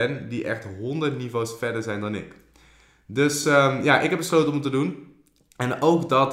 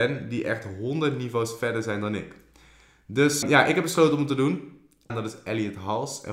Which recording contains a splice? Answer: second; 2 cuts; at 3.4 s, 5.1 s

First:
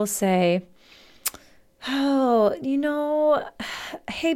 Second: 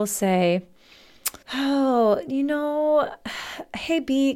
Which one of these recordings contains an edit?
second; 1 cut; at 1.4 s

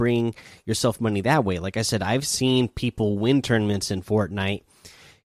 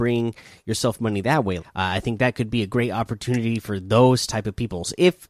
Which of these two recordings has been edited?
second; 1 cut; at 1.6 s

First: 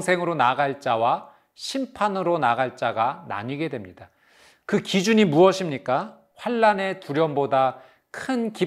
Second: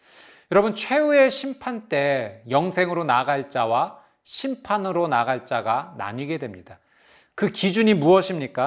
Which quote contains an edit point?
first; 1 cut; at 6.3 s

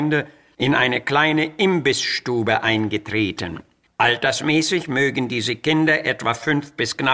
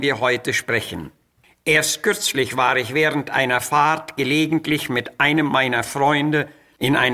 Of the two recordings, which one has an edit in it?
first; 1 cut; at 3.9 s

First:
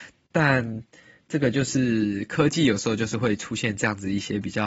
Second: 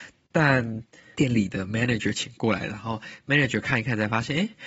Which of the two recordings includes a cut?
second; 1 cut; at 1.1 s

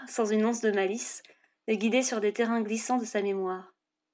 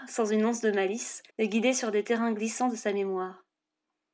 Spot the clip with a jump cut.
second; 1 cut; at 1.3 s

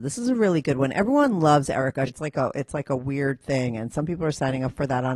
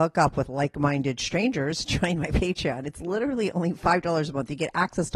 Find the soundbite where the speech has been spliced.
first; 1 cut; at 2.1 s

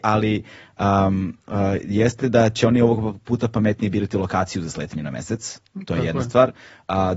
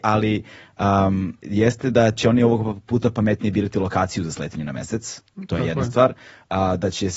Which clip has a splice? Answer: second; 1 cut; at 1.4 s

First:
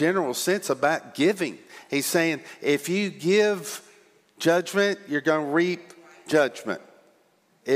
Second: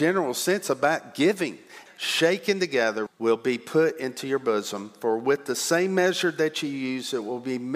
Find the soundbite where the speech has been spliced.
second; 2 cuts; at 1.9 s, 3.1 s

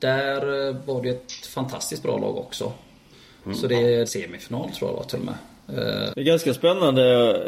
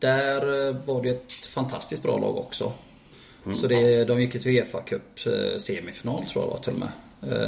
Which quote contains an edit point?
first; 2 cuts; at 4.1 s, 6.1 s

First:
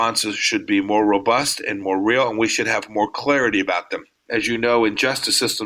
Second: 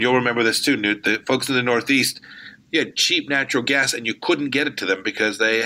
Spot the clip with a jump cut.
first; 1 cut; at 4.2 s

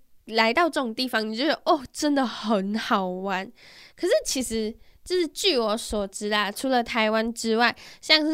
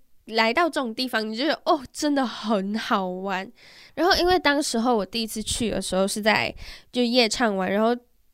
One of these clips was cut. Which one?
second; 1 cut; at 3.9 s

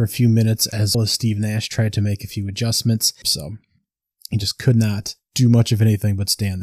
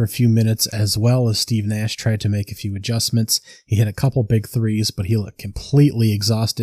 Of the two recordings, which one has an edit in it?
first; 2 cuts; at 0.9 s, 3.2 s

